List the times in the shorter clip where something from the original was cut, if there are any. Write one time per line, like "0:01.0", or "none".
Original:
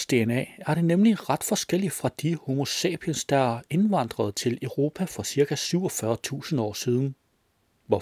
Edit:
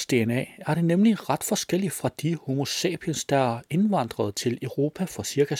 none